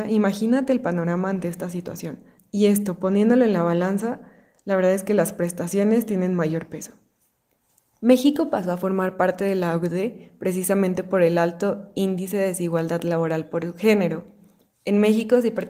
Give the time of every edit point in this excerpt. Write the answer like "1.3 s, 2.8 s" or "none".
2.4 s